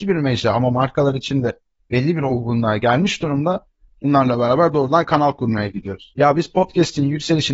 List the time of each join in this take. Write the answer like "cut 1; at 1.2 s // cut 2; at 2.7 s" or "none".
cut 1; at 3.9 s // cut 2; at 6.1 s